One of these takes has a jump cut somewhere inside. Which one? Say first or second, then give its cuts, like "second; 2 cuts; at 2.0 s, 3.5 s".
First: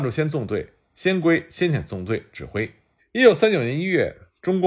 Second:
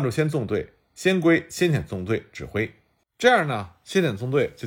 first; 1 cut; at 3.0 s